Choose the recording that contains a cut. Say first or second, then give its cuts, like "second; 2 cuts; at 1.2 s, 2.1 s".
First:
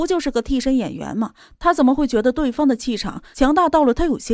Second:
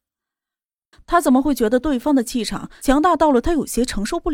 second; 1 cut; at 0.9 s